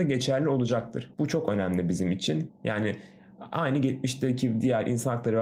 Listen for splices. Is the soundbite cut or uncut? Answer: cut